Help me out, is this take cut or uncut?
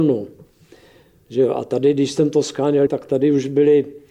cut